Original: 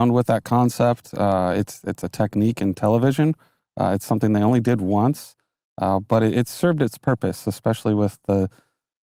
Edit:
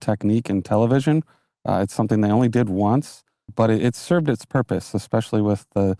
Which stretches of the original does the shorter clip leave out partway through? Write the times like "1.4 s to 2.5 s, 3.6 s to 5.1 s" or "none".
5.6 s to 6.0 s

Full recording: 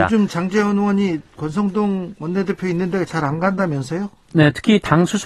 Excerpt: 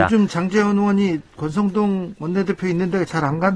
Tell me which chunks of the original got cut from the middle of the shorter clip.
none

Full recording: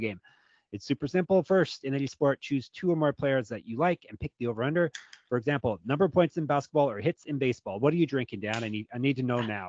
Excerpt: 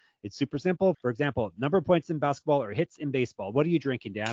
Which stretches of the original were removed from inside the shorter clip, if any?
1.4 s to 5.2 s

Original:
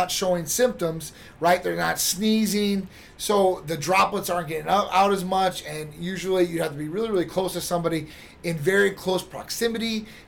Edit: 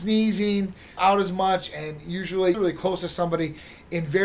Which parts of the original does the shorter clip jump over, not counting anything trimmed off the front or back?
3.1 s to 4.9 s, 6.5 s to 7.1 s

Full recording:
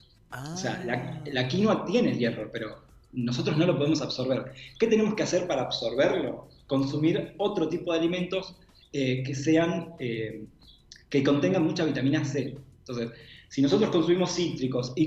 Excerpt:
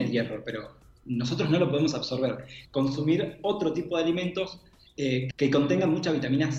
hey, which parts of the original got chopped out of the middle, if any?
4.7 s to 6.6 s, 9.3 s to 11.0 s

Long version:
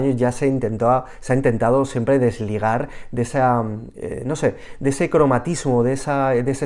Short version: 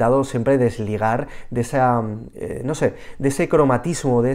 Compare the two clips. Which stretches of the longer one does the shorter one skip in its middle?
none

